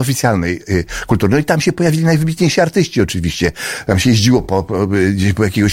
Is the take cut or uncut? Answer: uncut